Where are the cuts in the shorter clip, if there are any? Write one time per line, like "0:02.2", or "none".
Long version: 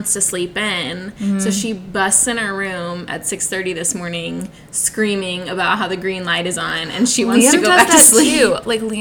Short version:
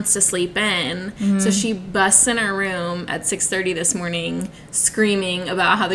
none